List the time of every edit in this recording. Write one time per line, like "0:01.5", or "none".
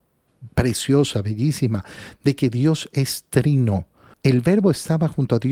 0:04.1